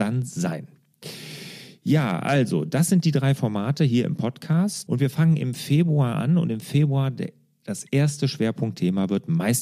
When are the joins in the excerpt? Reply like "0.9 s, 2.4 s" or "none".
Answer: 4.9 s